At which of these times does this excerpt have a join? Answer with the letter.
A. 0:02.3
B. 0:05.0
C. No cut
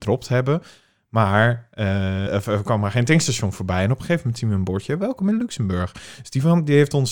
A